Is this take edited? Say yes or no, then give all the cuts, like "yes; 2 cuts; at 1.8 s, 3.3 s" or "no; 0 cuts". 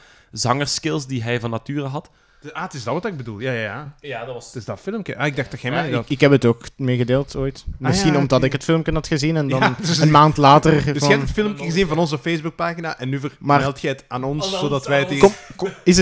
no; 0 cuts